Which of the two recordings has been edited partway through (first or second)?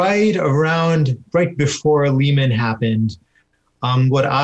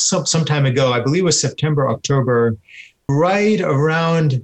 second